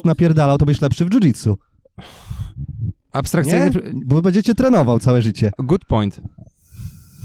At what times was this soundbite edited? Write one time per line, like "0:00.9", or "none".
none